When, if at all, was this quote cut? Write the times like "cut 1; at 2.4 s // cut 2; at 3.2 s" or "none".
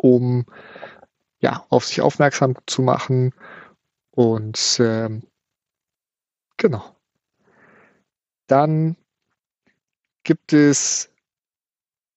none